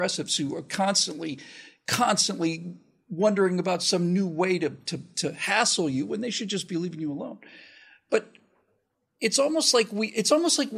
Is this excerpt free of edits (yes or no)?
yes